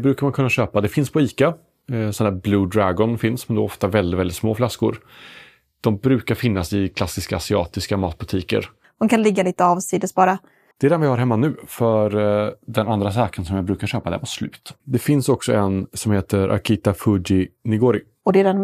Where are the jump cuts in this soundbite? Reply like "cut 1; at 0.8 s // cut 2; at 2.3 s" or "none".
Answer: cut 1; at 8.8 s // cut 2; at 10.7 s // cut 3; at 14.8 s